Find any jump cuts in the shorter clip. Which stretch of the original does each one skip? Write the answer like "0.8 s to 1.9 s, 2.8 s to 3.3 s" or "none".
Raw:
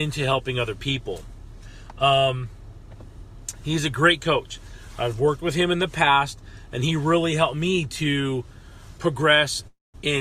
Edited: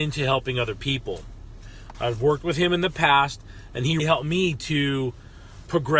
1.9 s to 4.9 s, 7.0 s to 7.3 s